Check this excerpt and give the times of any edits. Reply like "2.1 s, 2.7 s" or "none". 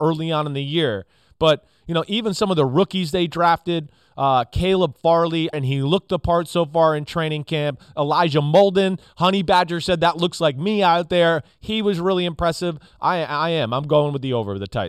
5.5 s